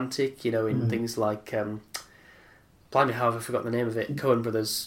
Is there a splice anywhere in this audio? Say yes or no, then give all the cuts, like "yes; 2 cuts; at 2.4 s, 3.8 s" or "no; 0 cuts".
no; 0 cuts